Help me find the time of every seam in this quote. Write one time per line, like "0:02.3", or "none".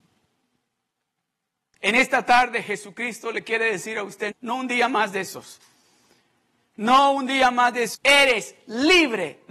0:04.3
0:07.9